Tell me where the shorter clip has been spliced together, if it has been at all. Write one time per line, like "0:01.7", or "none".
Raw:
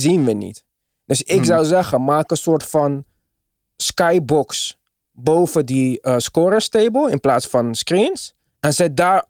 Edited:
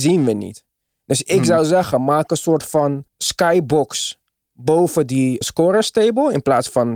0:03.1
0:05.4